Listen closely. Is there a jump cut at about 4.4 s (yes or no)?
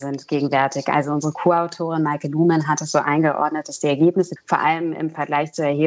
yes